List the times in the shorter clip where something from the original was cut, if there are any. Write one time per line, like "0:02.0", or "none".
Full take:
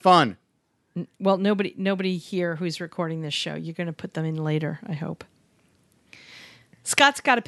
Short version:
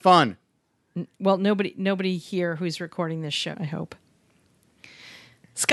0:03.5